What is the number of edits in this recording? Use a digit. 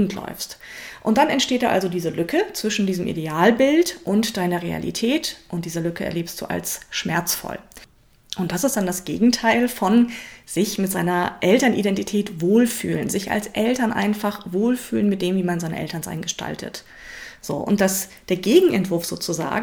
0